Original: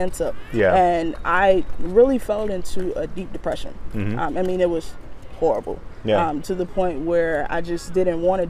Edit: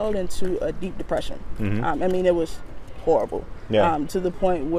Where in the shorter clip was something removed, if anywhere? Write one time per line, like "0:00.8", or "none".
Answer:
none

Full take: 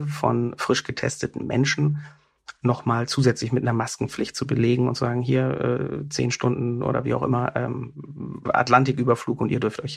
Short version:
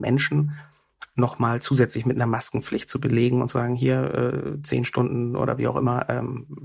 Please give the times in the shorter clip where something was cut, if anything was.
none

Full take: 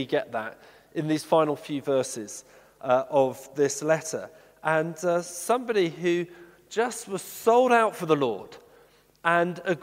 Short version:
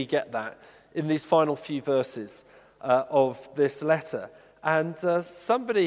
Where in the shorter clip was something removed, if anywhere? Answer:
none

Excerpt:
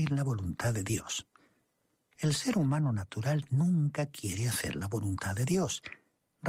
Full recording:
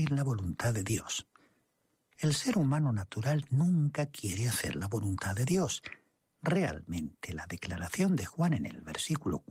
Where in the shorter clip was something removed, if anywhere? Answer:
none

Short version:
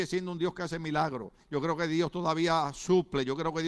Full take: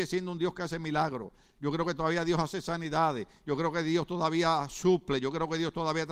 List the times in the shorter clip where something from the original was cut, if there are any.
0:01.4

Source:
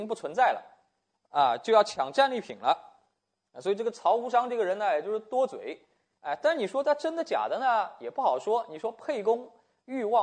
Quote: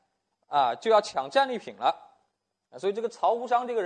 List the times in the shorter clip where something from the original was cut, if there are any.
none

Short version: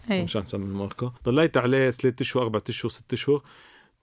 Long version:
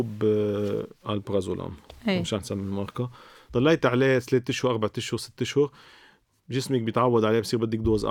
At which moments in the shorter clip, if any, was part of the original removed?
0:01.2

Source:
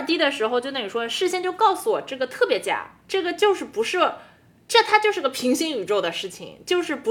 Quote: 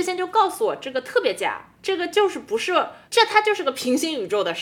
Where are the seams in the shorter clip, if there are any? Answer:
0:03.1

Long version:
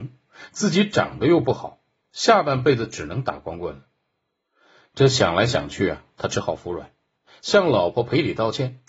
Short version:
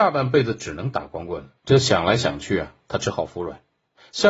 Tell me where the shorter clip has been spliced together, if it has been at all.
0:01.6

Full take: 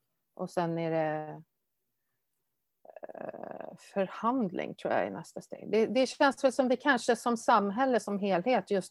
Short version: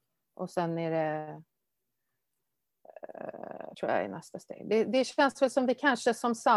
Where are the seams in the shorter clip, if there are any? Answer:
0:03.7

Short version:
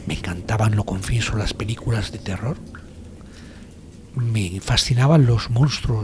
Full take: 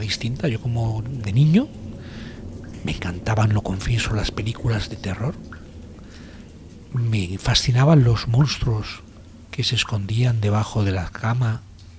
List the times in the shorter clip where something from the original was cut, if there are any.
none

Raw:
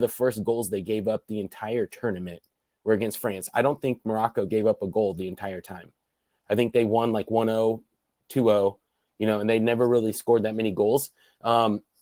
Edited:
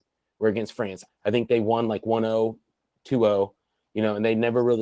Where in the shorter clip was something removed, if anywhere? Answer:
0:01.0

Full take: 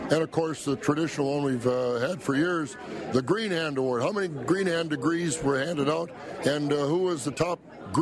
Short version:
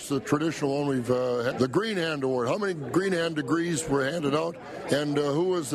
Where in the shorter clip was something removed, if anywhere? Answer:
0:01.5

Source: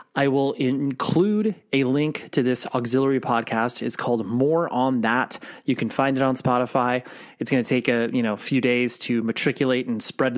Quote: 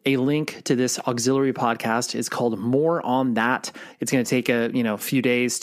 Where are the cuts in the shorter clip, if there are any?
0:03.9

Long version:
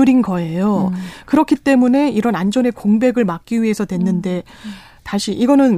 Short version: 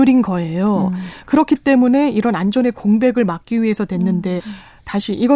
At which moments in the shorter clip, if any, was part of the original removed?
0:04.4

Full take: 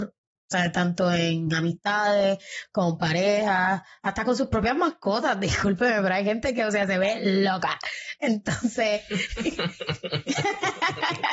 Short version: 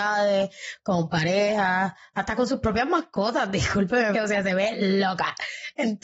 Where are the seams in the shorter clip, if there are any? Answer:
0:04.1

